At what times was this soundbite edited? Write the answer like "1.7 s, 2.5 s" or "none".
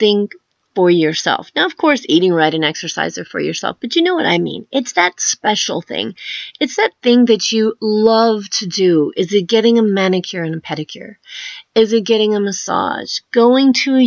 none